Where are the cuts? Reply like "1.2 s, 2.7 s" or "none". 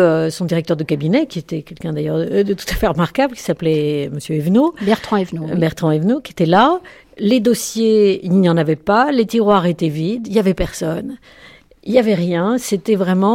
none